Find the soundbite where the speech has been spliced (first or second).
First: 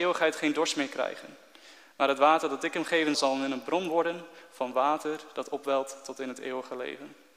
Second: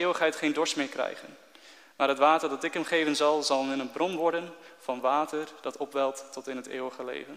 first